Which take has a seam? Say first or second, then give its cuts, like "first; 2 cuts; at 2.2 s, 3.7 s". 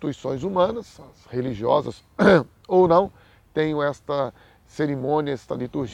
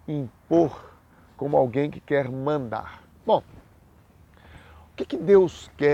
second; 1 cut; at 3.2 s